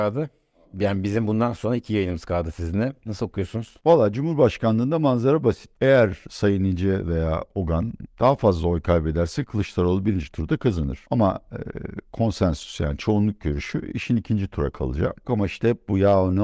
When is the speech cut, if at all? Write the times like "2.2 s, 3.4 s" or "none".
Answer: 3.0 s, 15.2 s